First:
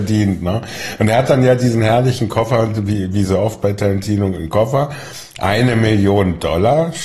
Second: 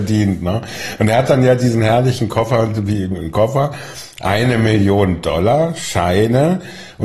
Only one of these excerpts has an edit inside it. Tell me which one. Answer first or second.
second